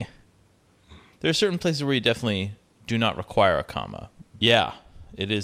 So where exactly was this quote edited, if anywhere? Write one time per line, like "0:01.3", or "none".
0:01.1
0:04.4